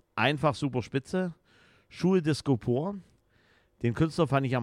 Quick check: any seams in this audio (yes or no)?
no